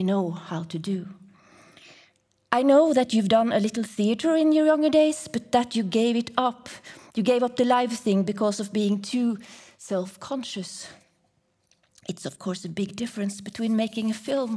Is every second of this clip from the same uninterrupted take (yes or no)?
yes